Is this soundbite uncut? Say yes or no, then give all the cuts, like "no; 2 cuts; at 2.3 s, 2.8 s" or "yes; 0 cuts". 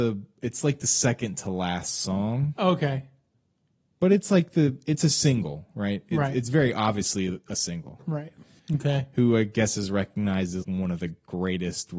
no; 2 cuts; at 8.6 s, 10.6 s